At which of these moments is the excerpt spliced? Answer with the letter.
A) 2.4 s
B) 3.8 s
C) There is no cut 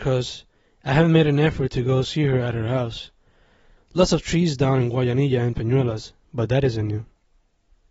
B